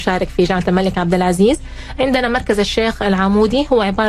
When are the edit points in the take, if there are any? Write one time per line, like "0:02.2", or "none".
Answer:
none